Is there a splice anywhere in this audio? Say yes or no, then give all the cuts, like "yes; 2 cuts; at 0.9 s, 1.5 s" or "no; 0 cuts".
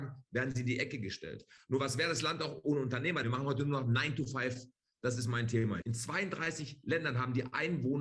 yes; 2 cuts; at 3.2 s, 5.8 s